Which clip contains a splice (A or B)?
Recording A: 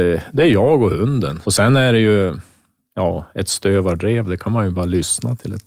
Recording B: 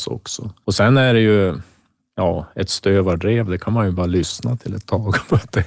A